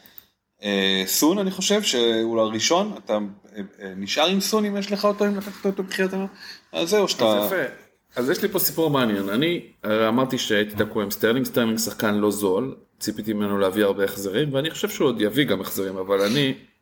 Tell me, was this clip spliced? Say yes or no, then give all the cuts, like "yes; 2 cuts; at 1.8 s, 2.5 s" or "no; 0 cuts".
no; 0 cuts